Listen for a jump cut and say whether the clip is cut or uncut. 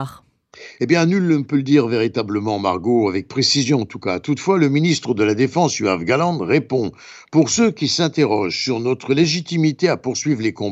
uncut